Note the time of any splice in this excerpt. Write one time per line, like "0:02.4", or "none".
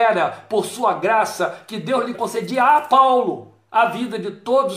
0:02.1